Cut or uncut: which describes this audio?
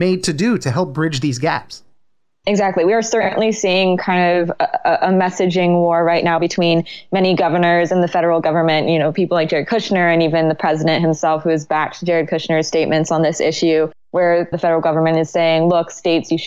uncut